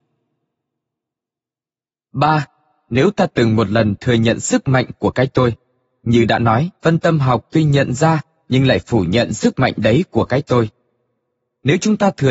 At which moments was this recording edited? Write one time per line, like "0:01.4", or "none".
0:06.8